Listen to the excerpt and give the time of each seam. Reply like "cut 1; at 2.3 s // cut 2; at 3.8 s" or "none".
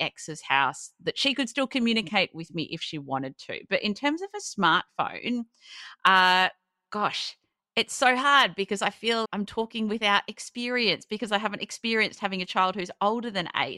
cut 1; at 9.2 s